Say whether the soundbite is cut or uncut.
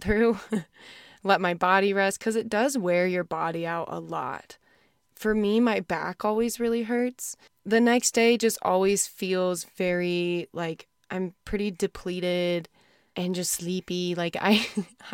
uncut